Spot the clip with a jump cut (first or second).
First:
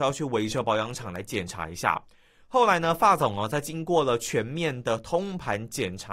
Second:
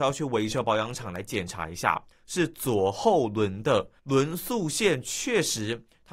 second